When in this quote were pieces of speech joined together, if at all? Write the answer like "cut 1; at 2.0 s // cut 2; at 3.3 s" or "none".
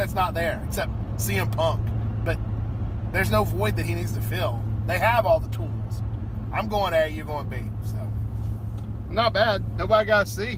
none